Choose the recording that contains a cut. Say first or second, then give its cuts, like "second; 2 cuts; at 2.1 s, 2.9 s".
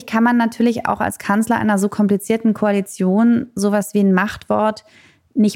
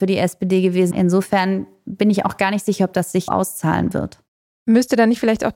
second; 2 cuts; at 0.9 s, 3.3 s